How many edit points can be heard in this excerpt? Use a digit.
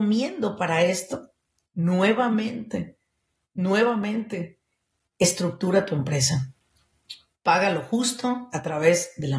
0